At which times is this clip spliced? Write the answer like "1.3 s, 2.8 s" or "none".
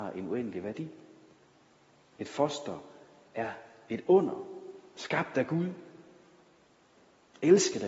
none